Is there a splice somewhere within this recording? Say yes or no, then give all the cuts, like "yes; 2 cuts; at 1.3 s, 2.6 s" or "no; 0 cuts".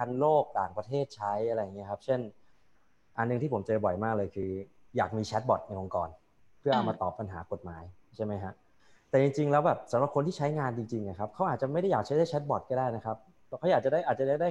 no; 0 cuts